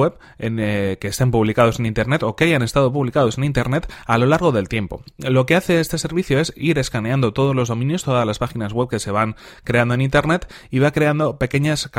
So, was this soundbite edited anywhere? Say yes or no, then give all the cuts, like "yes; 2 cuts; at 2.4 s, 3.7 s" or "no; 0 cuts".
no; 0 cuts